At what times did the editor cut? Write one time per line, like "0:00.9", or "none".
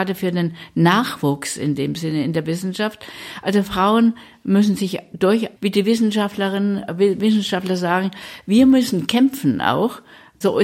0:05.6